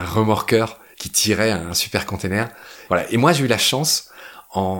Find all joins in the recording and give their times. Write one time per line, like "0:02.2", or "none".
0:02.9